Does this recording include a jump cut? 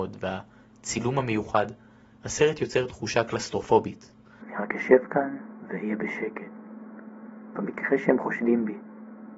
yes; 1 cut; at 4.4 s

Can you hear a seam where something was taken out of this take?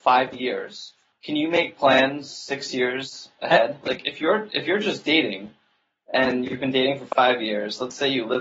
yes; 1 cut; at 3.8 s

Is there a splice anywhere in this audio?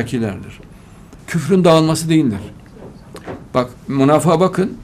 yes; 1 cut; at 1.2 s

